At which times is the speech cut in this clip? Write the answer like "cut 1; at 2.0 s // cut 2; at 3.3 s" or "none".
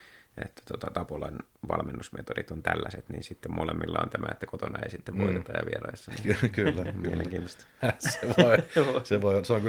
cut 1; at 7.8 s